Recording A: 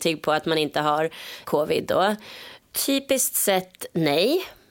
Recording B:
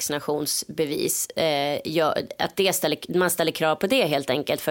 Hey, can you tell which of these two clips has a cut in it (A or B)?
A